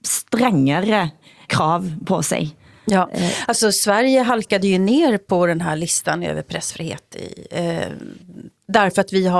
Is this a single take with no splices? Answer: no; 1 cut; at 1.5 s

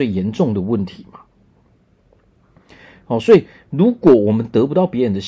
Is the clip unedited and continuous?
yes; 0 cuts

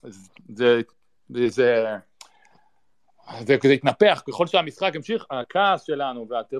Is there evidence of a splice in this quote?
no; 0 cuts

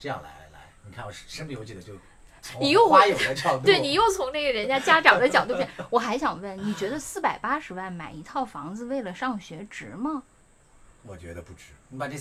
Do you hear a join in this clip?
no; 0 cuts

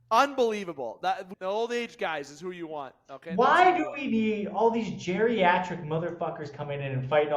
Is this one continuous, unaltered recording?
no; 1 cut; at 1.3 s

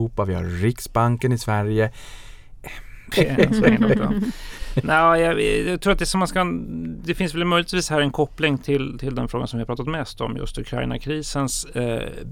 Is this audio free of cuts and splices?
no; 1 cut; at 3.1 s

